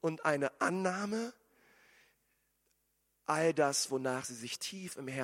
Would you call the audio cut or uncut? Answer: uncut